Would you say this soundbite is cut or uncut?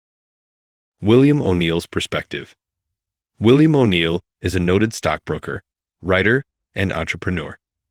uncut